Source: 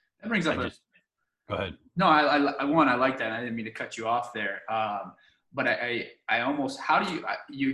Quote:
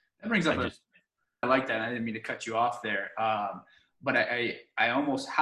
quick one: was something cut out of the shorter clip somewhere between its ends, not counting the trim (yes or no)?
yes